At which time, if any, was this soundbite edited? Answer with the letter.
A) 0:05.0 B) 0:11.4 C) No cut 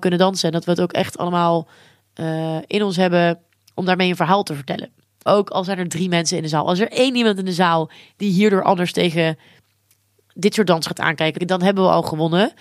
B